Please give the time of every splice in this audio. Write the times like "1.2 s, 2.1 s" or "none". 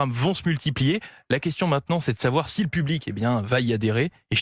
none